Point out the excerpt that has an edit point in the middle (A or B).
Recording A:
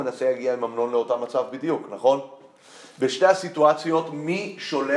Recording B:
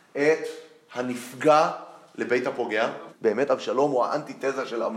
B